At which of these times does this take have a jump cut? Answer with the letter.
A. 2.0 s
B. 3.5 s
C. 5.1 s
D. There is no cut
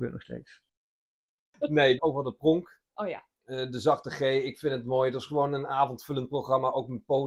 A